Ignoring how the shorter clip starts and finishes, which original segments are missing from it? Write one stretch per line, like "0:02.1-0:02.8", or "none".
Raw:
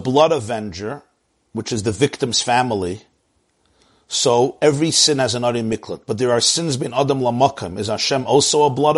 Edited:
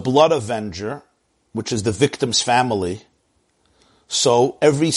none